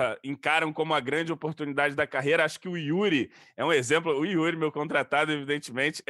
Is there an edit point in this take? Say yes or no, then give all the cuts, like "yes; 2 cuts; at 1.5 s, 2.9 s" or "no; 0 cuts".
no; 0 cuts